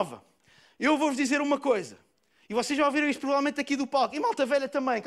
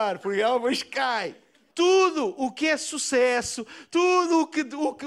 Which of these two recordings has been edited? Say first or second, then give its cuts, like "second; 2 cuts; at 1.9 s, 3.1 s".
second; 2 cuts; at 1.7 s, 3.9 s